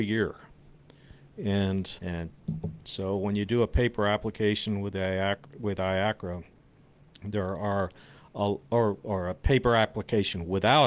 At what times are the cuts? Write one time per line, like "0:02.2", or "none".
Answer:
0:02.0